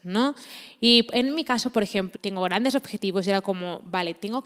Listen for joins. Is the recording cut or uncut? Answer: cut